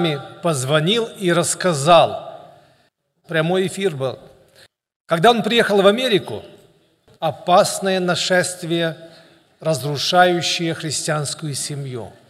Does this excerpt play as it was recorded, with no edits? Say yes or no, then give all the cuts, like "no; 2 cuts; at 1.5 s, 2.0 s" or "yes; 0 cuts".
no; 2 cuts; at 3.2 s, 7.1 s